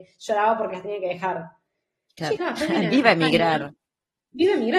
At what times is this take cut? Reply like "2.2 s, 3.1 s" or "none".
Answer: 2.4 s